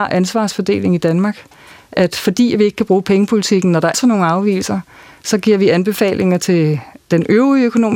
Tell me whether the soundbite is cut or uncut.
cut